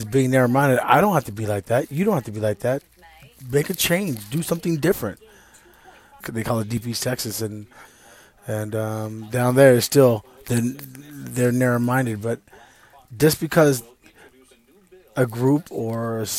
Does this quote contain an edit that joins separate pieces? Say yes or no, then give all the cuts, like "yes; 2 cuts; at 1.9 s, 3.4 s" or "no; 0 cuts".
yes; 1 cut; at 6.2 s